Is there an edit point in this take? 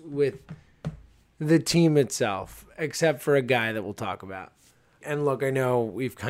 yes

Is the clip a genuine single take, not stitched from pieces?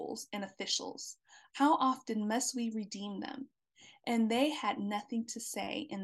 no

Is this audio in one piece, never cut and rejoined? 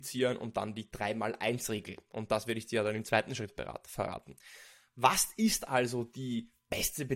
yes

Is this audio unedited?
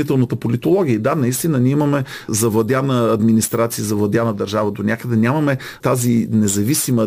yes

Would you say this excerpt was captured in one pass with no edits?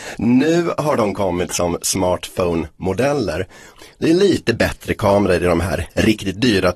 no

